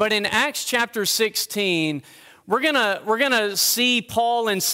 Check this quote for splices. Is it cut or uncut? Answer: uncut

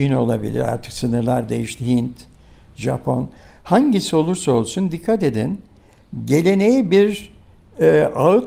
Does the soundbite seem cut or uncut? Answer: uncut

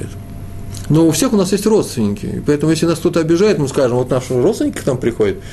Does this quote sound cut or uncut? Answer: uncut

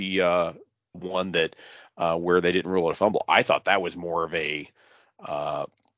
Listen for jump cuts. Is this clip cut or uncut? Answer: cut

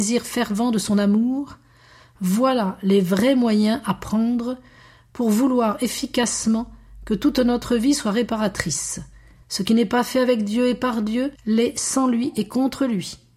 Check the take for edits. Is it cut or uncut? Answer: cut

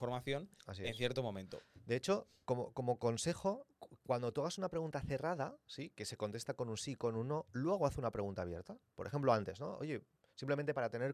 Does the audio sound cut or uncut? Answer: uncut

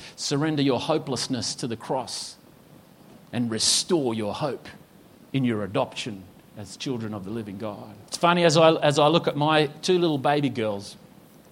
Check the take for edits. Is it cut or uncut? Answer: cut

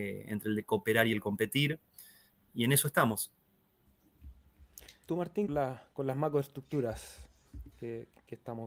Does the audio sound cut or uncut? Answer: cut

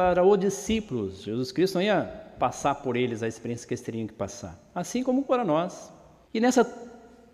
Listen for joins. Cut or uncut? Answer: cut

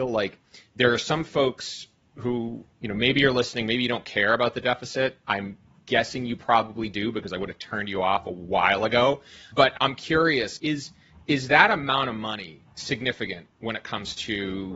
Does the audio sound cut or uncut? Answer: cut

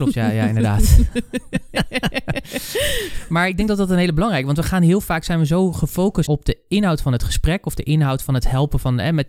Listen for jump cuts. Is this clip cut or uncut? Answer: cut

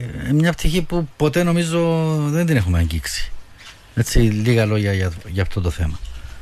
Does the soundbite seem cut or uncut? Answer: uncut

